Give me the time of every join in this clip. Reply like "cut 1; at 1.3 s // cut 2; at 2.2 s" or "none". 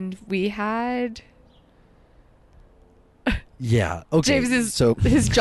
cut 1; at 3.5 s